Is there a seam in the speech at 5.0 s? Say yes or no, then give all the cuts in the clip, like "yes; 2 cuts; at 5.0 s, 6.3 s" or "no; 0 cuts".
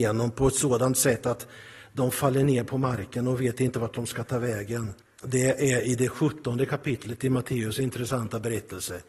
yes; 1 cut; at 5.0 s